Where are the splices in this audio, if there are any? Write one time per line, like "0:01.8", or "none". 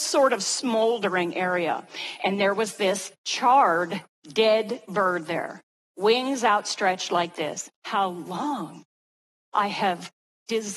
0:02.2
0:07.7